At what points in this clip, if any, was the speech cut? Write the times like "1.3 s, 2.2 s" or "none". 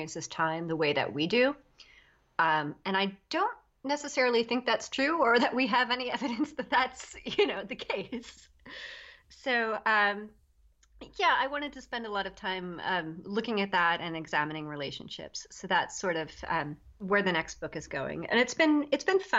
none